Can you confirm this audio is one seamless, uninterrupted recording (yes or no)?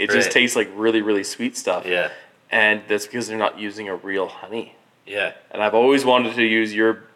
yes